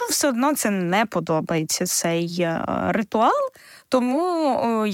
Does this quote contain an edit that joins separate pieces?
no; 0 cuts

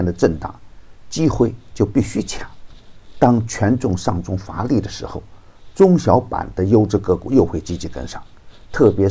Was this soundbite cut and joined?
no; 0 cuts

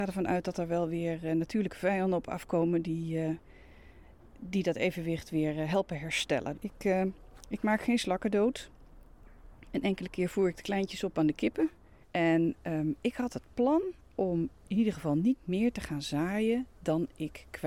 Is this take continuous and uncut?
no; 2 cuts; at 6.5 s, 12.0 s

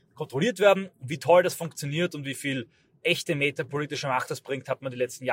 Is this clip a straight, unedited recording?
yes; 0 cuts

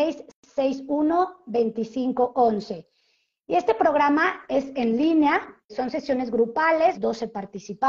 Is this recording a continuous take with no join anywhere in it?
no; 2 cuts; at 5.7 s, 6.9 s

